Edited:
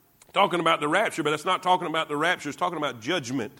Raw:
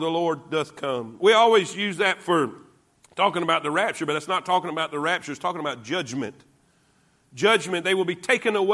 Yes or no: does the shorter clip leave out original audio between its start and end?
no